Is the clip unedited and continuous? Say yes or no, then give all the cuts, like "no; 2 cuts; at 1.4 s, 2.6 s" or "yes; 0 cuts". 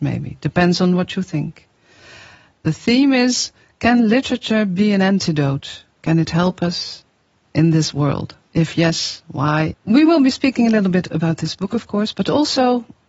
no; 1 cut; at 9.7 s